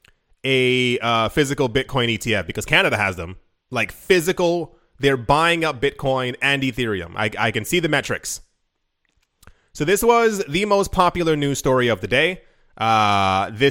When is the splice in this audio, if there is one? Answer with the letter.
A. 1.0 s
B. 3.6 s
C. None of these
B